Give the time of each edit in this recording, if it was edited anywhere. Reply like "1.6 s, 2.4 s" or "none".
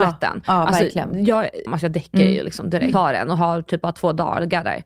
1.7 s, 2.9 s

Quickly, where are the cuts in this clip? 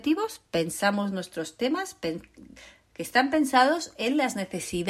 none

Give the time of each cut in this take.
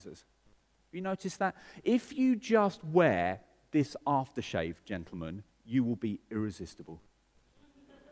none

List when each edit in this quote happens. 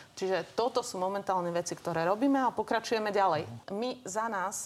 3.6 s

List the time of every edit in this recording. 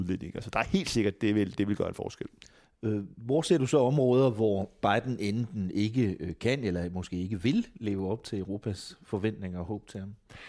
none

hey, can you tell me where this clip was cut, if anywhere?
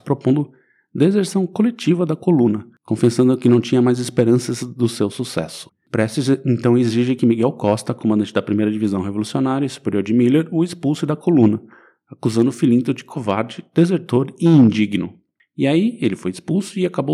5.7 s

